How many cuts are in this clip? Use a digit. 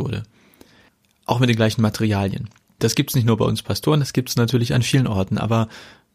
1